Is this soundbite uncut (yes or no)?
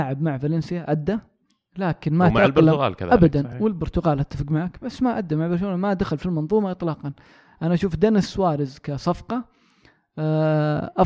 yes